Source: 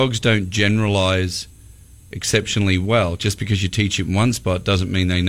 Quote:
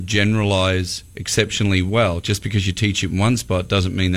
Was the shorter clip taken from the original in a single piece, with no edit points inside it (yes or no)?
no